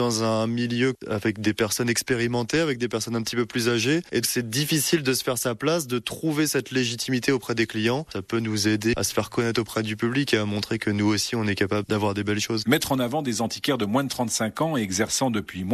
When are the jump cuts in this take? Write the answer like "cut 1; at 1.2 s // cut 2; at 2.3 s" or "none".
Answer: cut 1; at 4.2 s // cut 2; at 12.6 s